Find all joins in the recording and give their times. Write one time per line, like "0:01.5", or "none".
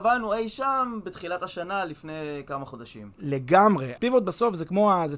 0:04.0